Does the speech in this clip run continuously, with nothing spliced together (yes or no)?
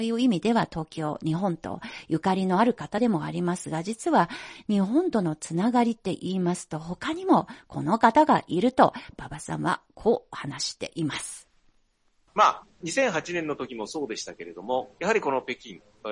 yes